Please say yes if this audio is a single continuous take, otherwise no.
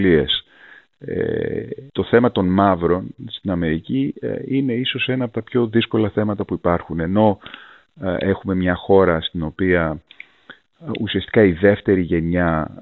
no